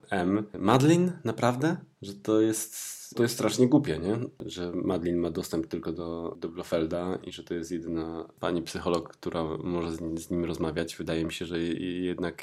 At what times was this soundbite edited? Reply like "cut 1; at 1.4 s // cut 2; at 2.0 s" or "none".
cut 1; at 3.1 s

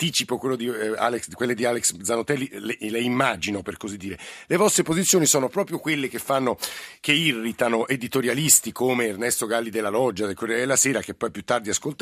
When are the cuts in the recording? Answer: none

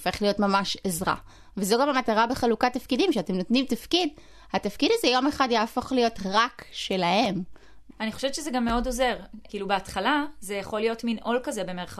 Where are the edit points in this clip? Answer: cut 1; at 7.9 s // cut 2; at 9.5 s

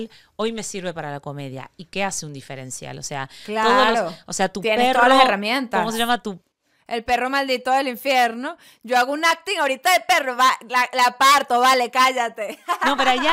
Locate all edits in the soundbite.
none

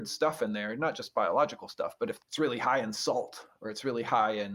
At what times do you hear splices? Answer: none

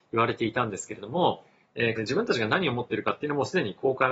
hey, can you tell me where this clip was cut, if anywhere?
cut 1; at 2.0 s

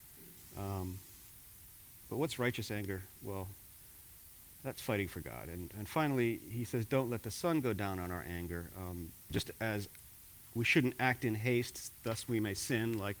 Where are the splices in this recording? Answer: none

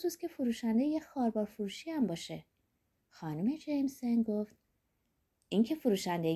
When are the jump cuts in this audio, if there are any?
none

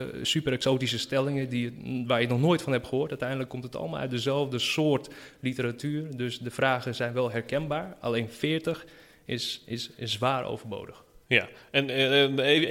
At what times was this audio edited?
none

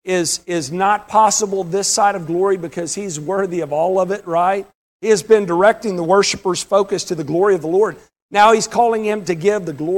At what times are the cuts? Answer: cut 1; at 4.9 s

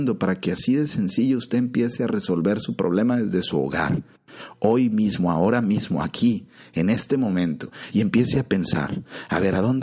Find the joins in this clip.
none

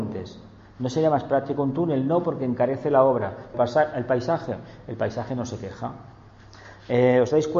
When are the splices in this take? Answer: cut 1; at 3.5 s

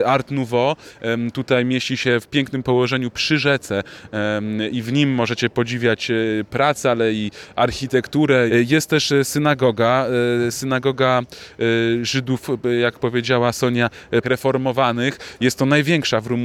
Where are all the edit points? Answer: cut 1; at 8.5 s // cut 2; at 14.2 s

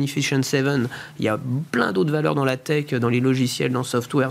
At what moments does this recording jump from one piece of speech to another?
none

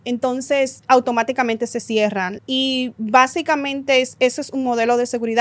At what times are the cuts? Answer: cut 1; at 2.4 s

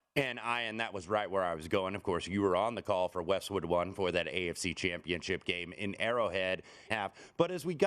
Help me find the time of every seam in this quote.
cut 1; at 6.9 s

